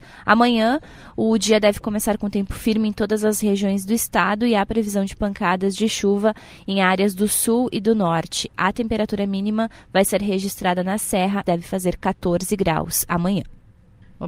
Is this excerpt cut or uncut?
cut